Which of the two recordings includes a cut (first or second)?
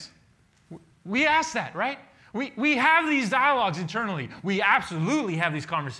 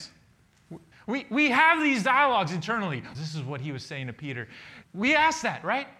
second